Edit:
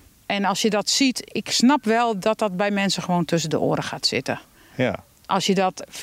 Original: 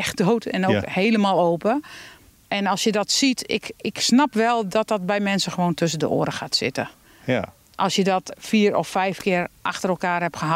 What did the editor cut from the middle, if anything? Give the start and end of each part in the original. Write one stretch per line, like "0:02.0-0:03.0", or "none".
0:03.5-0:03.7

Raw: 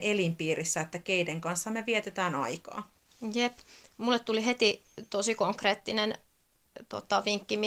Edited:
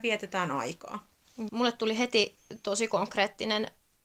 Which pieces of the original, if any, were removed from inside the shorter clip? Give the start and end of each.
0:03.3-0:04.0

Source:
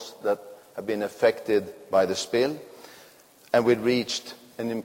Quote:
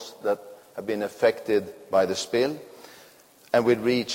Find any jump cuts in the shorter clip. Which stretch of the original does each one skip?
none

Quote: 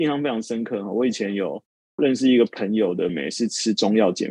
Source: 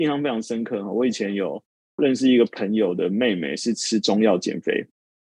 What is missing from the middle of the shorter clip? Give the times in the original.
0:03.1-0:03.4

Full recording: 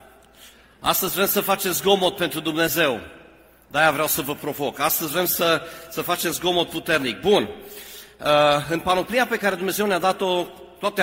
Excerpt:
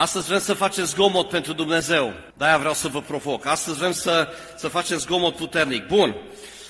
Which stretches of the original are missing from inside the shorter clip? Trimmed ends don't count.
0:03.2-0:03.6

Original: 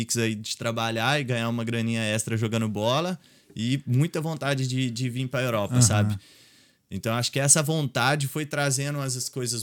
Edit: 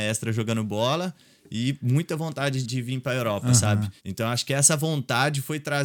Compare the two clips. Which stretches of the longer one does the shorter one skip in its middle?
0:04.7-0:04.9
0:06.3-0:06.8

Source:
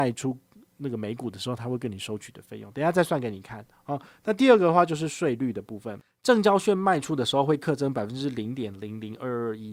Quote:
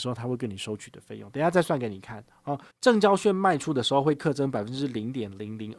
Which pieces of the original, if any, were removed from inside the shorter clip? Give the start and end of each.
0:04.1-0:06.1

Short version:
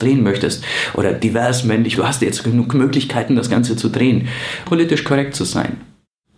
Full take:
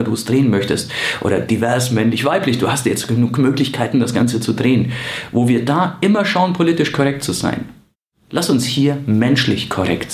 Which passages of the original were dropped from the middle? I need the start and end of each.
0:02.2-0:02.6
0:05.3-0:06.5

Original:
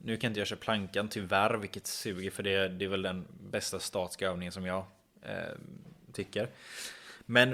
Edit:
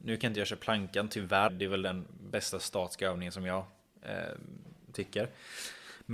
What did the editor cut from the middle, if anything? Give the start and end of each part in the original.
0:01.5-0:02.7

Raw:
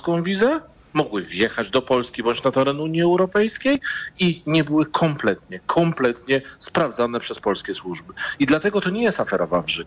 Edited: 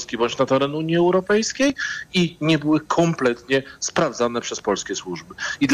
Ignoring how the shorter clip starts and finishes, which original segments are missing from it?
0:04.9-0:05.6

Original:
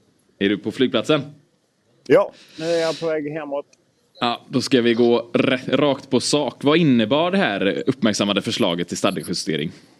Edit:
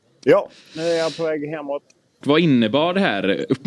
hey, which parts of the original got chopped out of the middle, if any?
0:04.0-0:06.6

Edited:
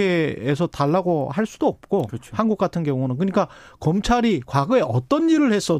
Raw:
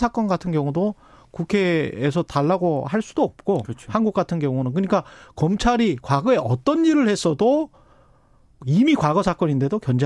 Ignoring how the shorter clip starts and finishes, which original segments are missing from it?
none

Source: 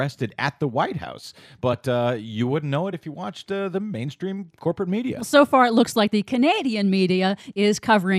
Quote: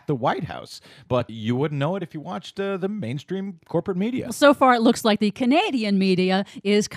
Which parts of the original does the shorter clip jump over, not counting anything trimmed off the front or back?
0:01.8-0:02.2

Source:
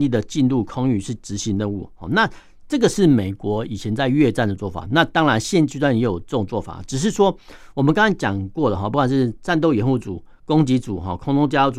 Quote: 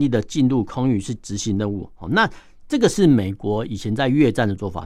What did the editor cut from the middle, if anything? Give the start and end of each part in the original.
none

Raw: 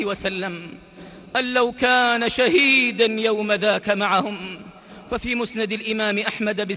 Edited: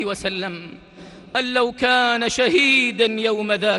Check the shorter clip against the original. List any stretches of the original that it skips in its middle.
none

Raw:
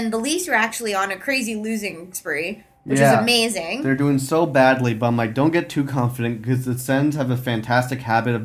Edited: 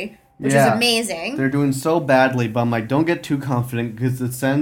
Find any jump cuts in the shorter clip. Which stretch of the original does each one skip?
none

